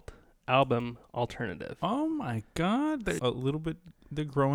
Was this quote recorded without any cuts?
no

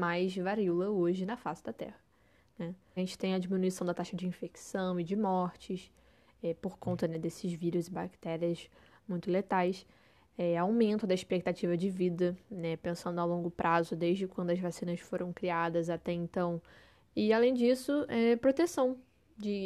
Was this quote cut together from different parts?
yes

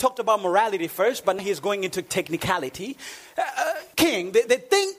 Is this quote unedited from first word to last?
no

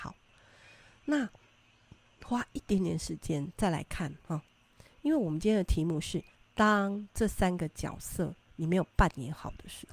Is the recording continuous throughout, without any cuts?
yes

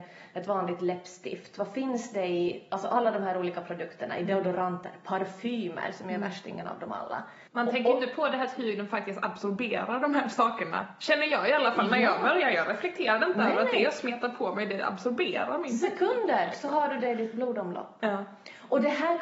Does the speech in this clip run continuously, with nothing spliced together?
no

